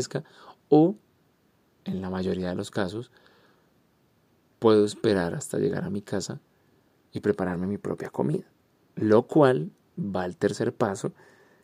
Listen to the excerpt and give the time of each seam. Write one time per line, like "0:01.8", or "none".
0:08.9